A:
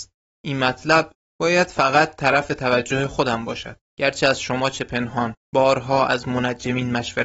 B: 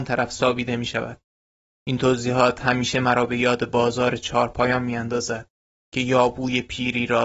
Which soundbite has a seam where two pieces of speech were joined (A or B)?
A